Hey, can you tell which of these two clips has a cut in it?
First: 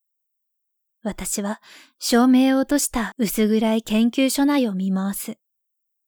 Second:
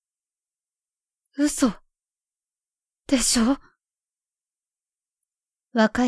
first; 1 cut; at 0.9 s

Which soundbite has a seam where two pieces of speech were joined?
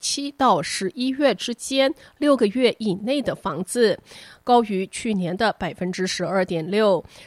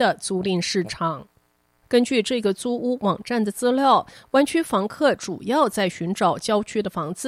second; 1 cut; at 1.8 s

